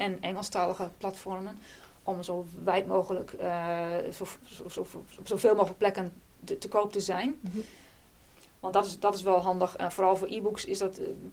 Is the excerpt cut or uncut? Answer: uncut